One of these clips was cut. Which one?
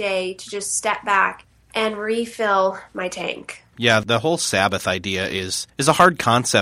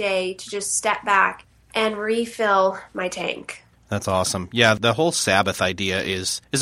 first; 1 cut; at 3.8 s

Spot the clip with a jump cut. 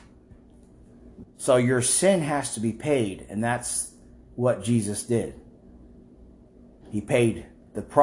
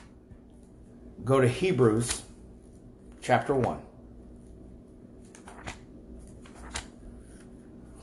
first; 1 cut; at 1.2 s

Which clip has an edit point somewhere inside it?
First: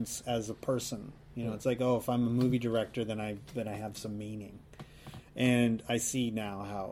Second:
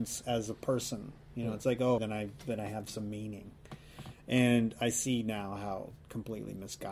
second; 1 cut; at 2.0 s

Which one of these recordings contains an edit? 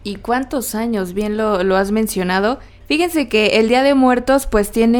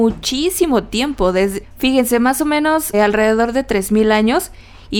second; 2 cuts; at 1.6 s, 2.9 s

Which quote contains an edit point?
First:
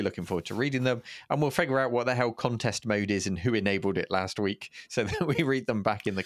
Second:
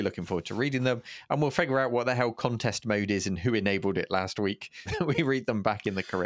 second; 1 cut; at 4.9 s

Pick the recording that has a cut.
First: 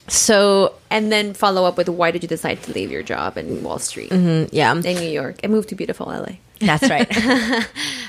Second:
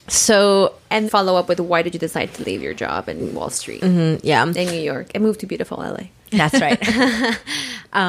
second; 1 cut; at 1.1 s

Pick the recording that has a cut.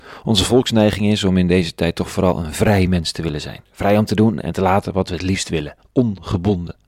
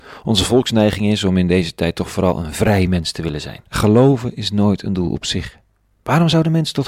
second; 1 cut; at 3.7 s

